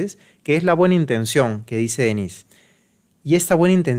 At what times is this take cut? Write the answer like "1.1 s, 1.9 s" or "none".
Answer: 1.6 s